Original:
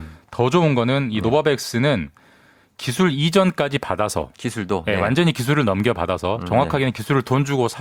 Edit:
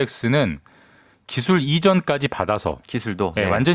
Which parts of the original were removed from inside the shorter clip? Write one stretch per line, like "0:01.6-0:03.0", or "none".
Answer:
none